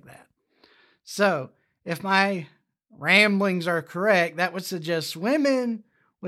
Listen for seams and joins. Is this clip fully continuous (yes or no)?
yes